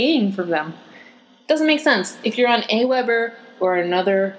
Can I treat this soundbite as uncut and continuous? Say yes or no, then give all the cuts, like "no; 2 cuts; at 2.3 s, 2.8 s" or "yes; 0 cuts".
yes; 0 cuts